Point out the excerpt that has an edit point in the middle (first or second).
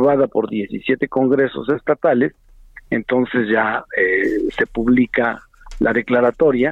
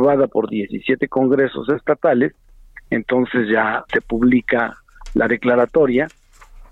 second